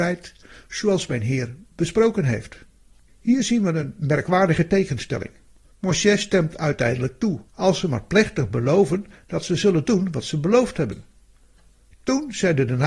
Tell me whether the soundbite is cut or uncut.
cut